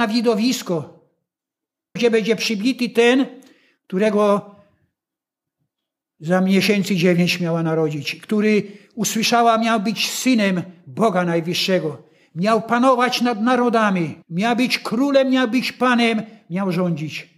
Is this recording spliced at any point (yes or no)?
yes